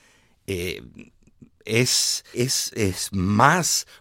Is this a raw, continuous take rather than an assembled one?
no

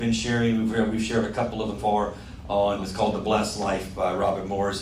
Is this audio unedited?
no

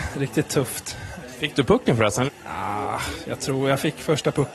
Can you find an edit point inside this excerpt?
yes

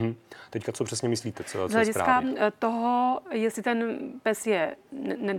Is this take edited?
no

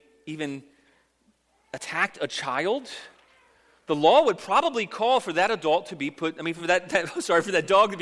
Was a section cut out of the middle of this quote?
no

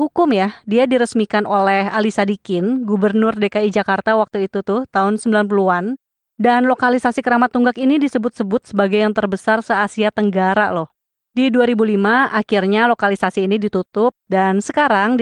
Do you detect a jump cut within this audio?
no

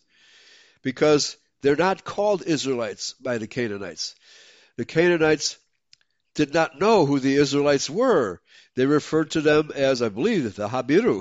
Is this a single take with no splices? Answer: yes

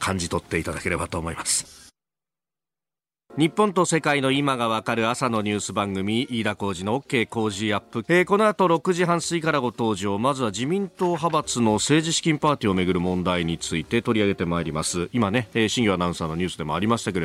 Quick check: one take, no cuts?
no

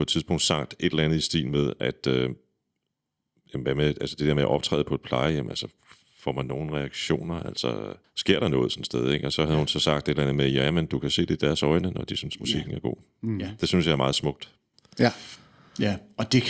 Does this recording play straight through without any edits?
yes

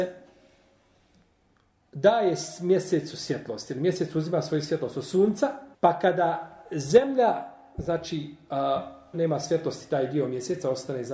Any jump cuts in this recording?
yes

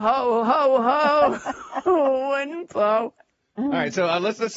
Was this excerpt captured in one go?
yes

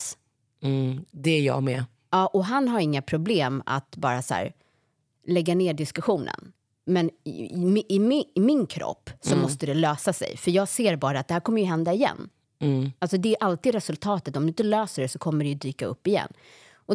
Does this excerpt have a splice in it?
no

